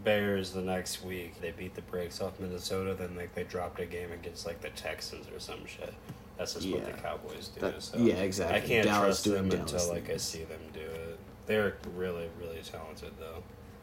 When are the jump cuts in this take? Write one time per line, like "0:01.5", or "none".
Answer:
0:01.4